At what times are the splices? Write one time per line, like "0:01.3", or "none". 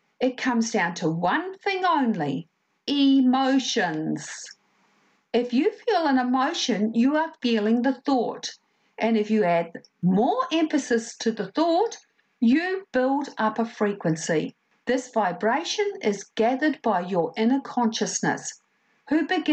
0:14.7